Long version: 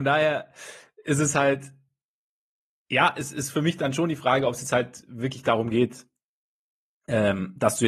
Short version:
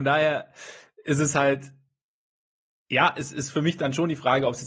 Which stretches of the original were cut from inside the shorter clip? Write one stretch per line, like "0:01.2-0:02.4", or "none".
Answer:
none